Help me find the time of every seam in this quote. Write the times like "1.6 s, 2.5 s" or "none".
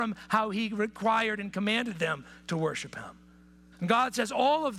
3.7 s